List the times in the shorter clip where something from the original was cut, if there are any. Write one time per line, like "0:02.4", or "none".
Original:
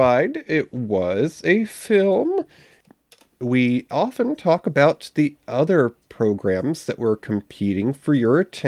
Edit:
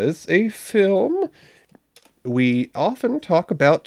none